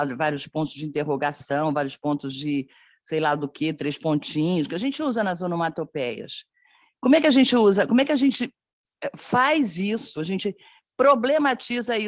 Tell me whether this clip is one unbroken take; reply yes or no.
yes